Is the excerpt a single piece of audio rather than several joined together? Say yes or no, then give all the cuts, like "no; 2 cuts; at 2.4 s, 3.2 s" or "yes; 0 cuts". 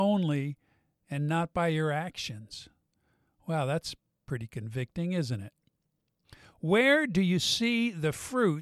yes; 0 cuts